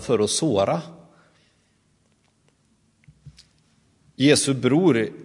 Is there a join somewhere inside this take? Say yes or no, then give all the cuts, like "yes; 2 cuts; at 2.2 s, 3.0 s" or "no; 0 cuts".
no; 0 cuts